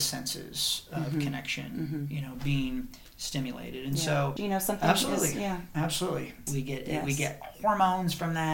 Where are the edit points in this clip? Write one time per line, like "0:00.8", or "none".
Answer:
0:04.4
0:06.5